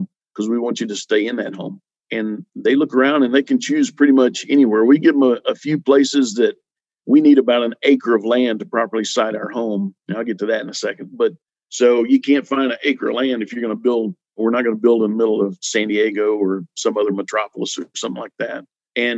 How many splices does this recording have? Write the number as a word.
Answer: one